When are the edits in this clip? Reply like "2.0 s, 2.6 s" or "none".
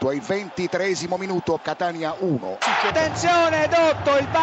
1.6 s, 2.9 s

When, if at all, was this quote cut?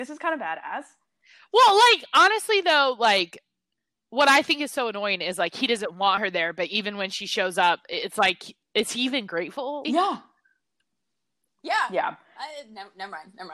9.8 s

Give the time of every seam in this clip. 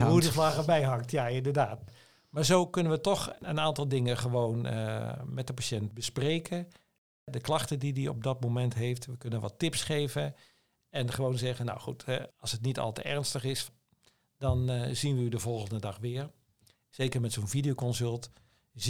12.3 s, 16.7 s

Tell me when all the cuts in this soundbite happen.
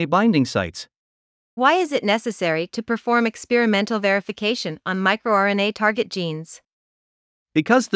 1.6 s

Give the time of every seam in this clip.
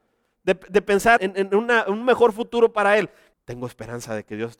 1.2 s, 3.3 s

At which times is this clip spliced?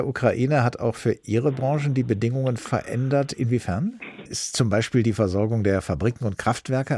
4.2 s

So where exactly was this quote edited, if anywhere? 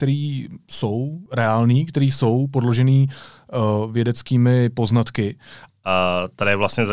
5.7 s

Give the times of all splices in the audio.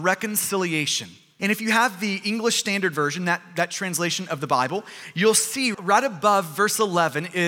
1.4 s, 5.7 s

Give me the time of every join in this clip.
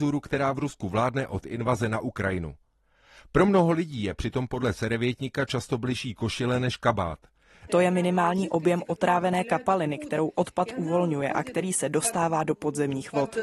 7.7 s

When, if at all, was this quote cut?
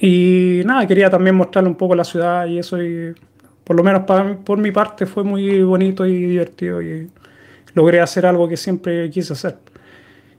none

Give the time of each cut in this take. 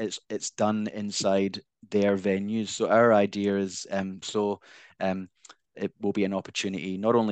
4.2 s, 5.7 s

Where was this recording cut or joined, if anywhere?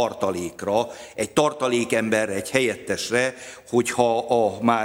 none

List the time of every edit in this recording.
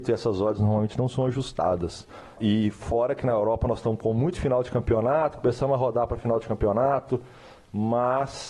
none

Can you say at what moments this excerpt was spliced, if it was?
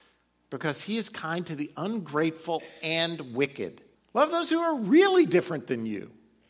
3.9 s

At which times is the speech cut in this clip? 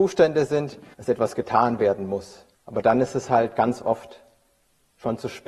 0.9 s, 2.5 s

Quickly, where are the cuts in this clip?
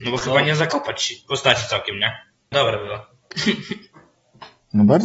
2.5 s

